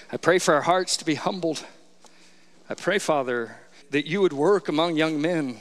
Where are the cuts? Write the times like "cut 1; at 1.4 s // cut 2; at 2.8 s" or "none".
cut 1; at 2.5 s // cut 2; at 3.8 s